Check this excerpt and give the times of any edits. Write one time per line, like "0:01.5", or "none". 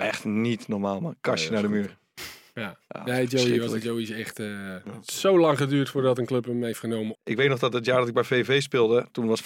0:07.2